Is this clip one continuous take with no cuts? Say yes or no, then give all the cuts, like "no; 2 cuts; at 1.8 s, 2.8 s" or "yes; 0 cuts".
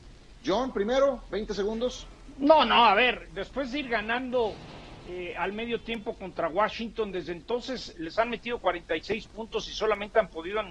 yes; 0 cuts